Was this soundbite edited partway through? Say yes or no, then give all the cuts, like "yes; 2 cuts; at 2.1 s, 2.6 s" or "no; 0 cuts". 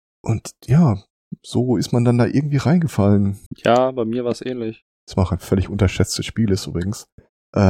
yes; 2 cuts; at 3.5 s, 4.9 s